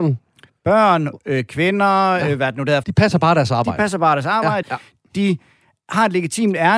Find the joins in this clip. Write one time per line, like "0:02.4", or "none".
0:02.8
0:04.6